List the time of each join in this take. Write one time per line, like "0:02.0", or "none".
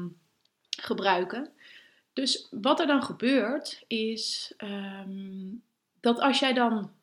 none

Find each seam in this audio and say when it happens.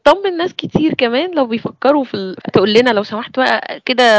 0:02.5

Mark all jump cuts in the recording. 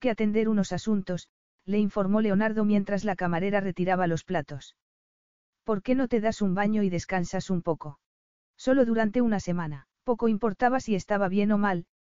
0:08.4
0:09.9

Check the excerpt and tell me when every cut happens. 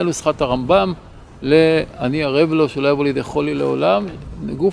none

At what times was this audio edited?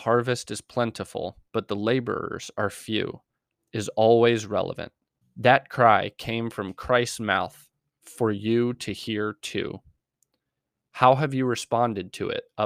0:05.2

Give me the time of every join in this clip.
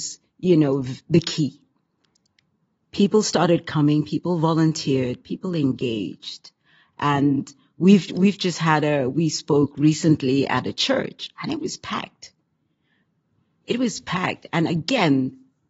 none

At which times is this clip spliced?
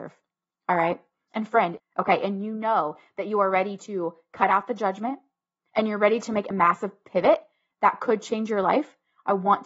0:01.8

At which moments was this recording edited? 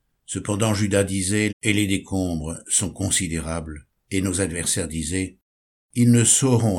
0:01.5
0:04.0

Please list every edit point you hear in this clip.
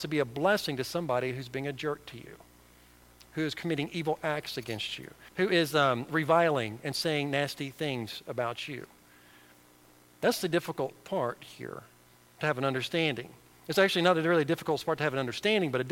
0:05.3

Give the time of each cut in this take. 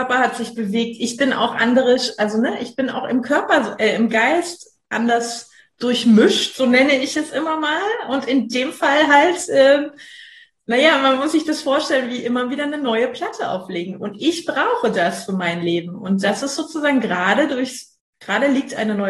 none

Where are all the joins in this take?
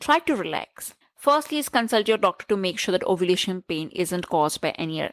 0:01.0

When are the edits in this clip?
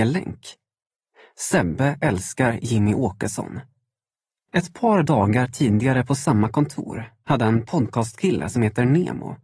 0:04.5

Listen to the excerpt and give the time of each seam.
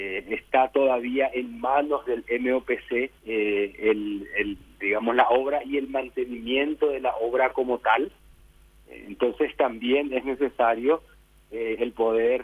0:03.2

